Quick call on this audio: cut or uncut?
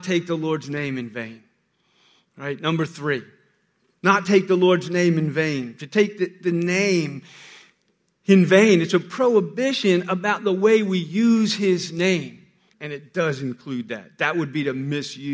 cut